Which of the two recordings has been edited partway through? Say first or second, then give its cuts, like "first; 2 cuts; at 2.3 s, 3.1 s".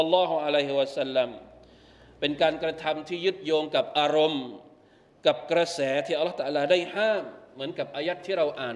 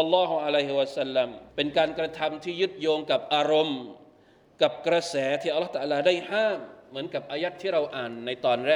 second; 1 cut; at 1.5 s